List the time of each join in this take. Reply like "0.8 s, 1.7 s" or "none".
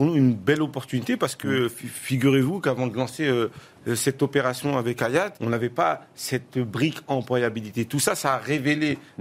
5.4 s

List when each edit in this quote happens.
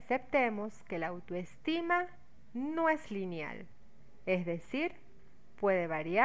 none

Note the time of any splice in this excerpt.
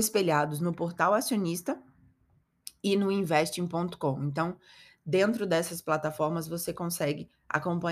none

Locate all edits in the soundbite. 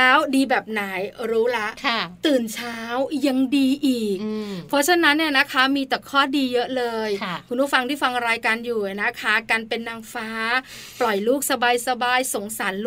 none

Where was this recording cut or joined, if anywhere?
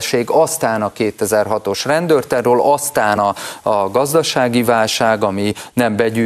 none

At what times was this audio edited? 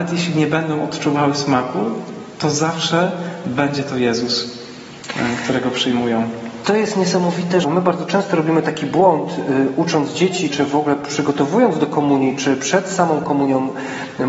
7.6 s, 10.5 s

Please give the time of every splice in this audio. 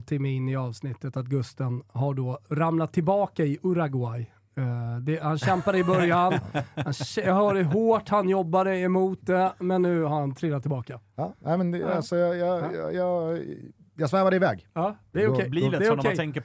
15.1 s

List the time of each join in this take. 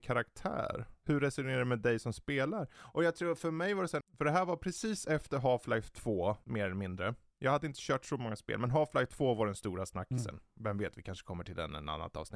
4.0 s

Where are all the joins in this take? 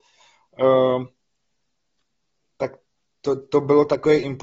none

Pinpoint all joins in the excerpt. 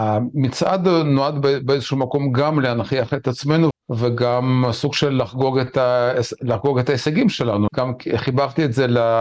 3.7 s, 7.7 s

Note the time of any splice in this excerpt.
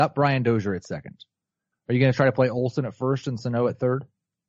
1.7 s

